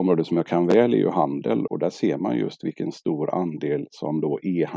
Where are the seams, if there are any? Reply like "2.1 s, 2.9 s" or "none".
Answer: 1.7 s